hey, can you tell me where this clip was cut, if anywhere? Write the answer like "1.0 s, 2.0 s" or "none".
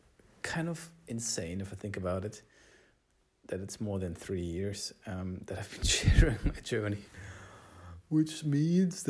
none